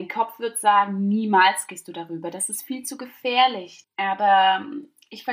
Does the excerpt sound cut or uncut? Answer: cut